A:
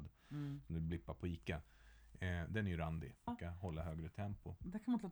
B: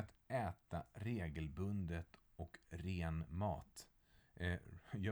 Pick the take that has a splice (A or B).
A